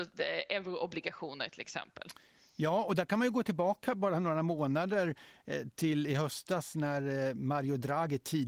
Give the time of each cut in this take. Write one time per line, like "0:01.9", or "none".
none

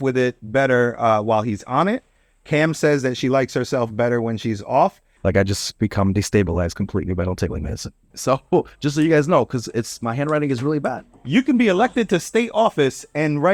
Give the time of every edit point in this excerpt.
0:05.2
0:08.1

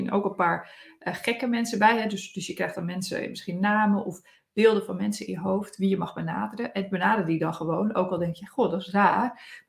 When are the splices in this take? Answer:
none

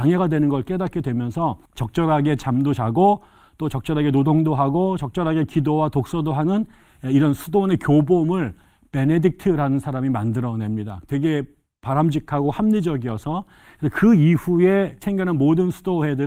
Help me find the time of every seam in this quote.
0:01.6
0:11.0

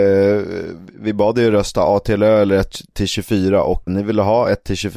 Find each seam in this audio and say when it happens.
0:03.9

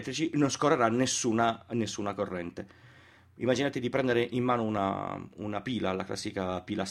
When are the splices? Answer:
none

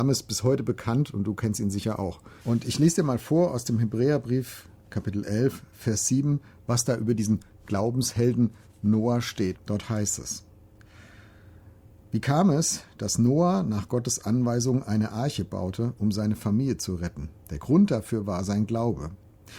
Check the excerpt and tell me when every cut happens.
0:02.4
0:09.5
0:17.4

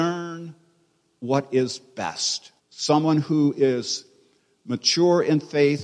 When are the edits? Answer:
0:02.6

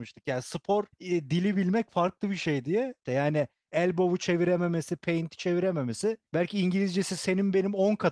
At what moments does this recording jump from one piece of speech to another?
0:00.9
0:03.1
0:06.3

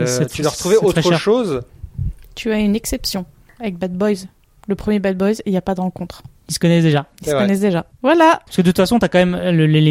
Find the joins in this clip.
none

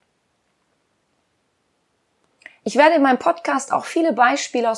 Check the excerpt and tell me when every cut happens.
none

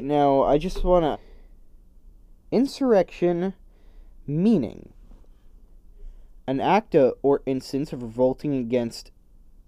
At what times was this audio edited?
0:01.1

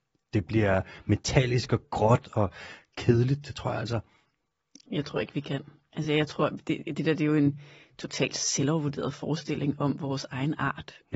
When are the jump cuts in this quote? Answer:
none

